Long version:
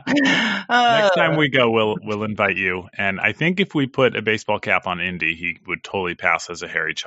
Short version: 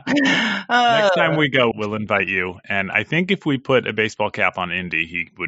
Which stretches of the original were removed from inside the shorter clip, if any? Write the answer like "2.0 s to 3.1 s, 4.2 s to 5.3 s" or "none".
1.7 s to 2.0 s